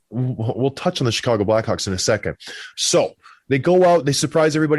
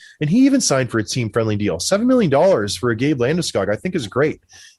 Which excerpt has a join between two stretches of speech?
first; 1 cut; at 2.7 s

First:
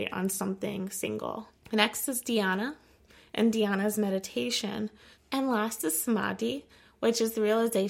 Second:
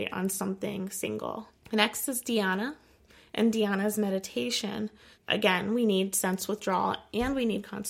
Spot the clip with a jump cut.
first; 1 cut; at 5.2 s

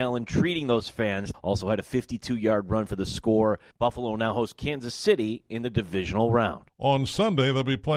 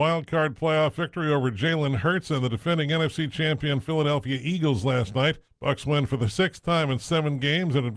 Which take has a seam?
first; 3 cuts; at 1.3 s, 3.7 s, 6.7 s

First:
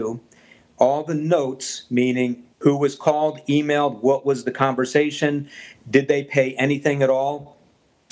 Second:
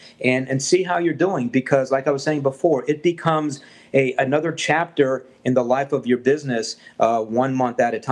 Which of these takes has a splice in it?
first; 1 cut; at 2.5 s

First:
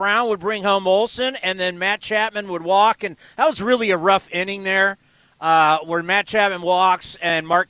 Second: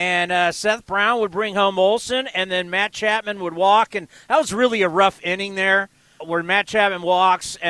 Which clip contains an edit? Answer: second; 1 cut; at 6.2 s

